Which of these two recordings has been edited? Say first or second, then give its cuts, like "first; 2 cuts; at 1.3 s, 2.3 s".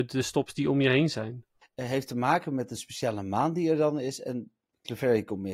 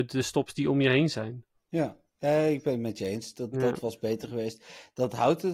first; 1 cut; at 1.6 s